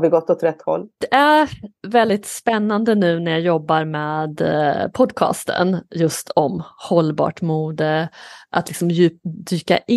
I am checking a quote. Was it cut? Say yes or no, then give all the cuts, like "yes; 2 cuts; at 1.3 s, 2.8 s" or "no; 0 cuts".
no; 0 cuts